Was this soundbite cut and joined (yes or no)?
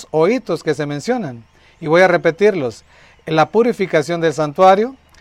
no